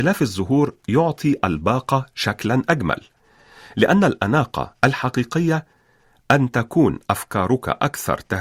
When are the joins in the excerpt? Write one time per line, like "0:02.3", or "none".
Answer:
none